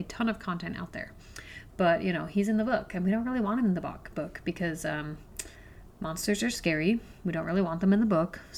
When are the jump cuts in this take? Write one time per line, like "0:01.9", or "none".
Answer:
0:01.7